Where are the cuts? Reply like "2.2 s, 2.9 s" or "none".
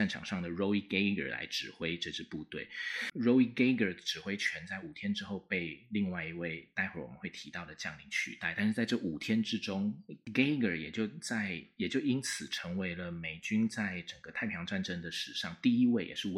none

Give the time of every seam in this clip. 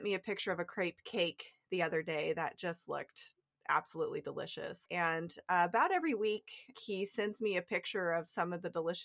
4.9 s, 6.7 s

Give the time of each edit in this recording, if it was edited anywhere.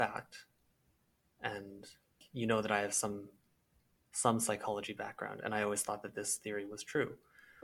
none

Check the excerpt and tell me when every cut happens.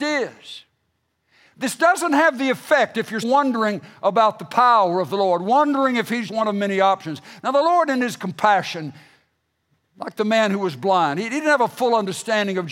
3.2 s, 6.3 s

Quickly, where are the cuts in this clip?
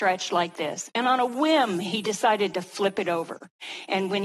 none

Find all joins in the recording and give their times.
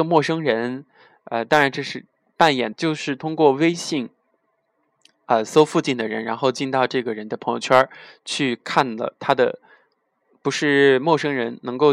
2.7 s

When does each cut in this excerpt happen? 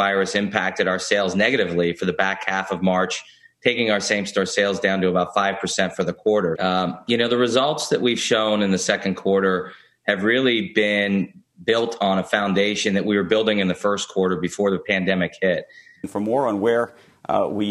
6.6 s, 16.0 s

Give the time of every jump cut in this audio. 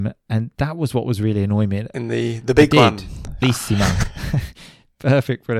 1.9 s, 3.4 s

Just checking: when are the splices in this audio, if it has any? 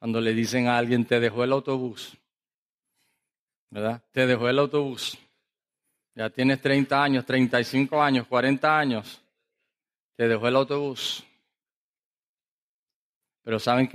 none

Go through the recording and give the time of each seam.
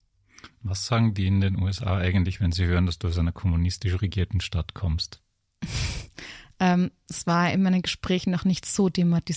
none

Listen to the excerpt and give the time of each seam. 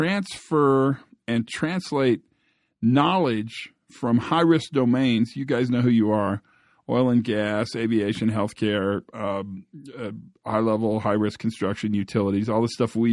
none

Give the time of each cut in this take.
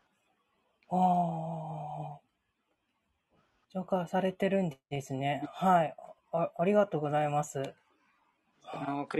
none

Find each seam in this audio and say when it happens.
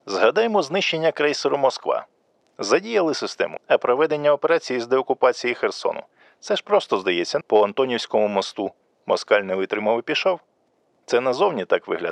3.6 s, 7.4 s

